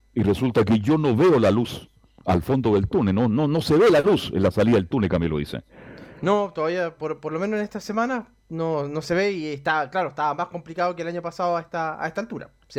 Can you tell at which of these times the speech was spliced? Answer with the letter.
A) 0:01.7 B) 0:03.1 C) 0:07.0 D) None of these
C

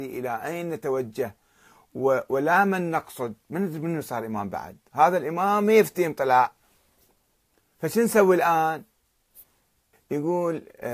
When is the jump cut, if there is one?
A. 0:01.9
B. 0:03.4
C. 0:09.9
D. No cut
C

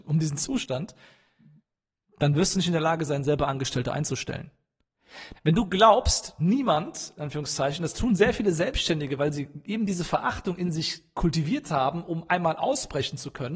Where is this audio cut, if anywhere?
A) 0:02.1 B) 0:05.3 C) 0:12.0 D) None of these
B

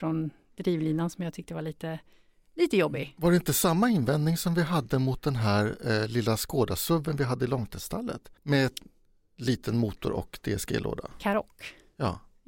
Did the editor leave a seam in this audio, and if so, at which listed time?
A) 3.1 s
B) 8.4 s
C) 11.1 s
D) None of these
B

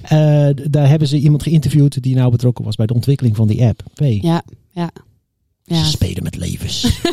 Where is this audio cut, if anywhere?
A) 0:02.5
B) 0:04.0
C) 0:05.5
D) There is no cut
B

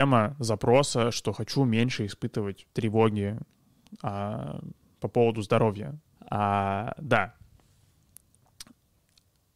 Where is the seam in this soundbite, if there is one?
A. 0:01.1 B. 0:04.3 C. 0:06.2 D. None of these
C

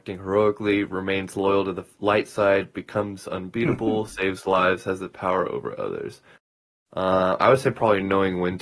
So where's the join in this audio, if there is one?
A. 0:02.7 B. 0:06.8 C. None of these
C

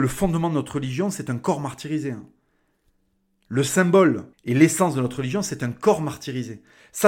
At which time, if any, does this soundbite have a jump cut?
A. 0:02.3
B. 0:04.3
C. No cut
B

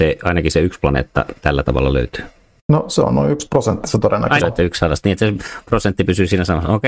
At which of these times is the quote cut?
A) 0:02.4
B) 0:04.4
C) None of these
B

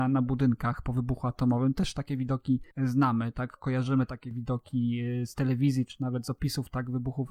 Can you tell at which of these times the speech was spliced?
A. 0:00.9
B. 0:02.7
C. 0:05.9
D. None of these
B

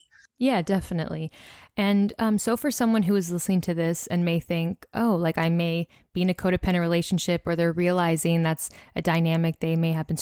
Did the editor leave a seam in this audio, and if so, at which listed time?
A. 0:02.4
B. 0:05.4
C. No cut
C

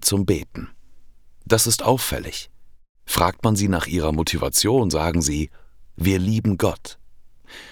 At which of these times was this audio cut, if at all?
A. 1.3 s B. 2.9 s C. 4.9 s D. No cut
D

